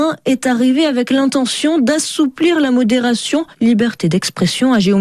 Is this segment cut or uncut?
cut